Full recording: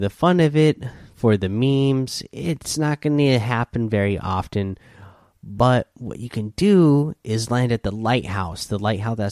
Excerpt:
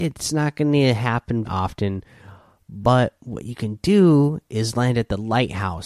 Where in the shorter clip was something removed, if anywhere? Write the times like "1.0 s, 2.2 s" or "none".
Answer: 1.4 s